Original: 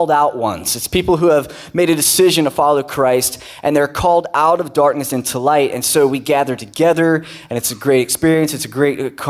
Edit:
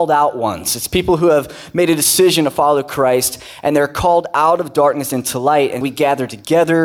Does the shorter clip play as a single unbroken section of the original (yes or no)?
no